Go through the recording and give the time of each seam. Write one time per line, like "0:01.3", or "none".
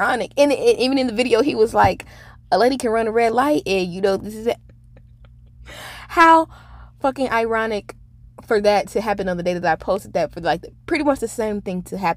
0:04.6